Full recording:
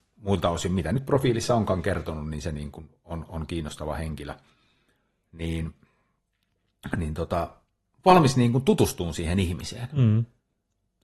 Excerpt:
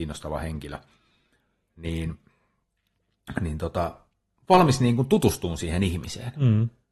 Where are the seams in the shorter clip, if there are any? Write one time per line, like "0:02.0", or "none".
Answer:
none